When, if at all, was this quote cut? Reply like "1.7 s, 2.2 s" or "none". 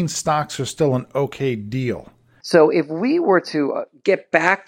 2.4 s